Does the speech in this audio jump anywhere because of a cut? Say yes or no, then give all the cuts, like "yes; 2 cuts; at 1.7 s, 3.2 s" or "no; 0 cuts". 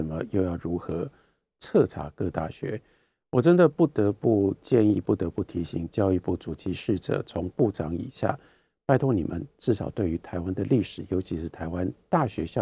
no; 0 cuts